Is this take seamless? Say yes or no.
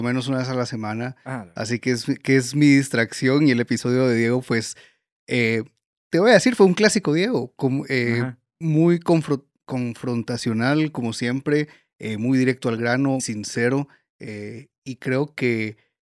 no